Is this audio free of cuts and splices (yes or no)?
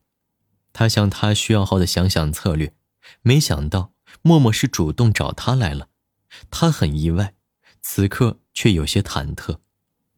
no